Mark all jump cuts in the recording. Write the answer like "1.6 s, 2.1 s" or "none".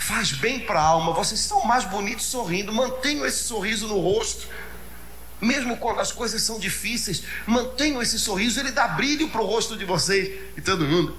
none

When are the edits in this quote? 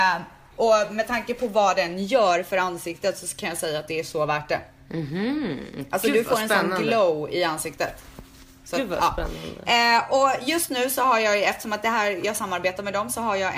none

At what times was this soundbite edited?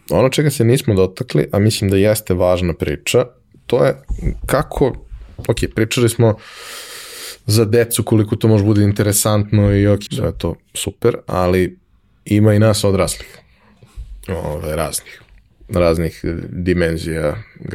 10.1 s

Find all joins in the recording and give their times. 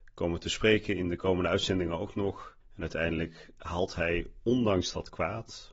2.6 s

